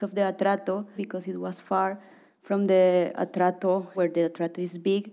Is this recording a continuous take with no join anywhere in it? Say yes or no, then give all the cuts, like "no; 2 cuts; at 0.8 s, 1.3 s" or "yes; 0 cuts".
no; 2 cuts; at 1.0 s, 3.9 s